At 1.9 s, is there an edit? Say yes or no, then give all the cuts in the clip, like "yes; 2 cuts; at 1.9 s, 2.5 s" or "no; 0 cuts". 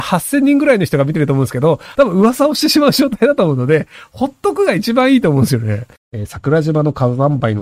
yes; 2 cuts; at 1.9 s, 6.0 s